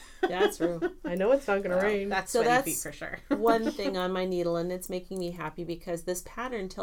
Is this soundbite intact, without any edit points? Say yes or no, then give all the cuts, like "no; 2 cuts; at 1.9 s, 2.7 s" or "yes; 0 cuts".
yes; 0 cuts